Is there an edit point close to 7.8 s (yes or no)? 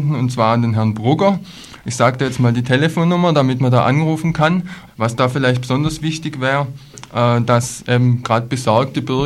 no